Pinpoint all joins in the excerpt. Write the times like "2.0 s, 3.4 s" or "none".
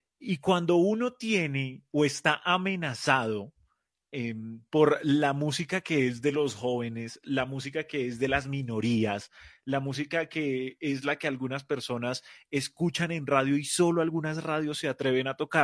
none